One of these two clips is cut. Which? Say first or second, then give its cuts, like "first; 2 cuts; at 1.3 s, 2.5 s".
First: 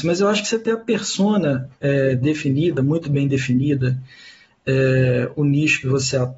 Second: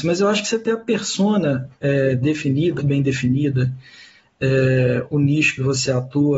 second; 1 cut; at 2.8 s